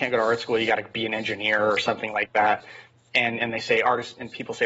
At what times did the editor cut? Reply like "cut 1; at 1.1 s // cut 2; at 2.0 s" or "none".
none